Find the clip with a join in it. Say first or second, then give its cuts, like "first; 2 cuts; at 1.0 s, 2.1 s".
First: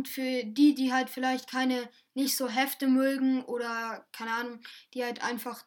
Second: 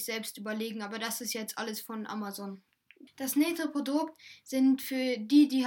second; 1 cut; at 3.1 s